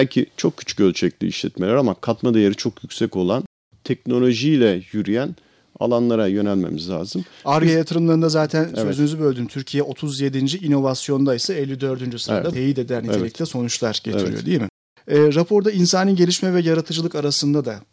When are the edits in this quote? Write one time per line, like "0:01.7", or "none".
0:12.5